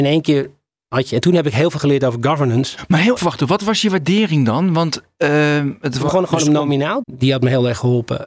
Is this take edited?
yes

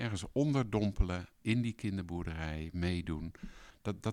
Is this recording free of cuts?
no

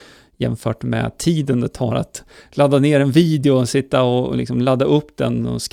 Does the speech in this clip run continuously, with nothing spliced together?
yes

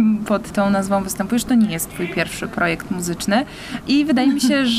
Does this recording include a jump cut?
no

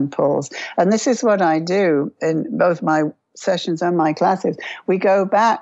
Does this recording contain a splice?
no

